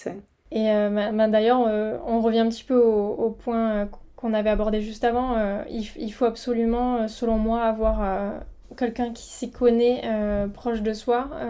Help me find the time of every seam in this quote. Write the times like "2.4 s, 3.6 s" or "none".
none